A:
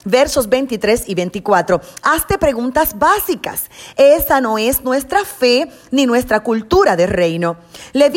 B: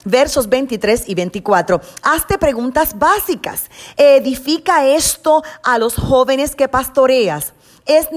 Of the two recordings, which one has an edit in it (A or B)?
A